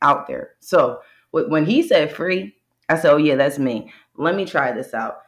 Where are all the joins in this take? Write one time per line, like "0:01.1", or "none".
none